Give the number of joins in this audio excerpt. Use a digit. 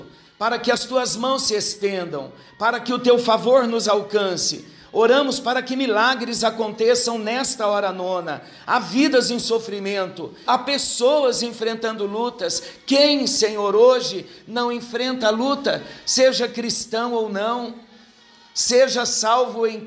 1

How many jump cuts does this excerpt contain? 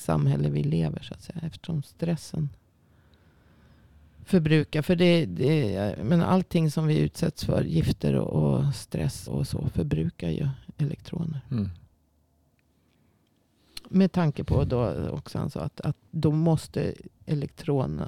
1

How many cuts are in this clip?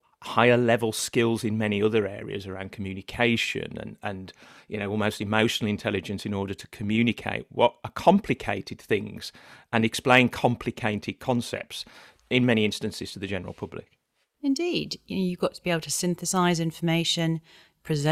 0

